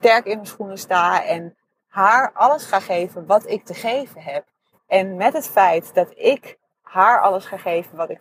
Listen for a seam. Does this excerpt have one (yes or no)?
no